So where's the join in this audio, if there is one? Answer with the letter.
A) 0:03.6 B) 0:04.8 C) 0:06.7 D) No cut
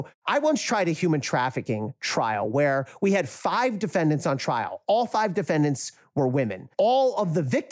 C